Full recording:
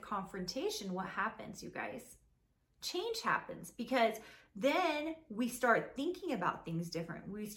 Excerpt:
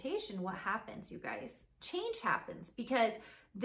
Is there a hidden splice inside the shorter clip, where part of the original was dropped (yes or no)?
yes